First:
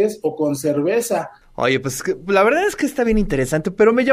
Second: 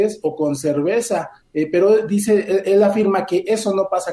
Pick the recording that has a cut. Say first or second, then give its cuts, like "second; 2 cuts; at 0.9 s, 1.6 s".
first; 1 cut; at 1.4 s